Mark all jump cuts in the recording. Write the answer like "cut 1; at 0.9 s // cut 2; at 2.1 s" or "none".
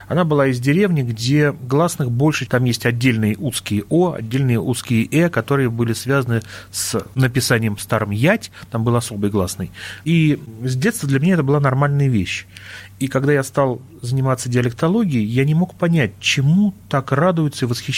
cut 1; at 2.5 s

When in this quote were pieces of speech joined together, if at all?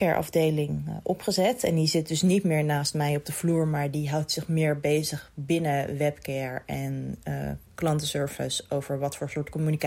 none

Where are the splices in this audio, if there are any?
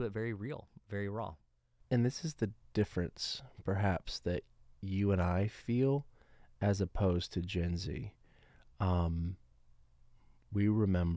none

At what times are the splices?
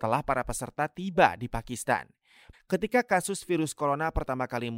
cut 1; at 2.5 s

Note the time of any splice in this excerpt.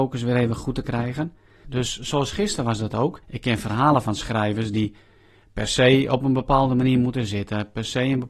cut 1; at 1.6 s // cut 2; at 3.2 s

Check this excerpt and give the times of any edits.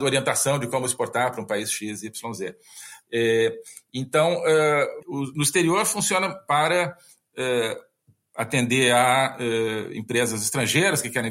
cut 1; at 3.0 s // cut 2; at 5.0 s

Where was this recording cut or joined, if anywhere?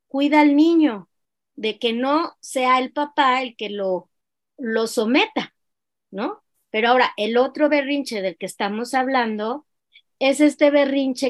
cut 1; at 6.5 s

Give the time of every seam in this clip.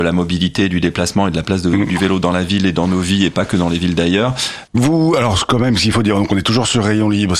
cut 1; at 4.7 s

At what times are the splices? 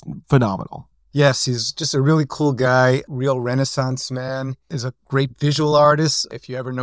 none

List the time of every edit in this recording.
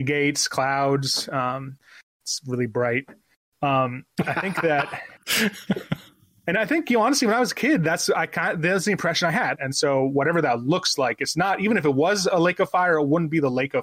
cut 1; at 9.5 s

